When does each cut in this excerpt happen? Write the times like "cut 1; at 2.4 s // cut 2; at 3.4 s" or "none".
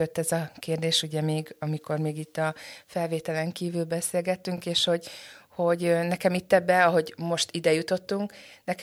none